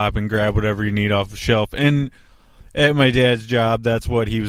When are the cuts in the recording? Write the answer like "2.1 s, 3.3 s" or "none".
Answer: none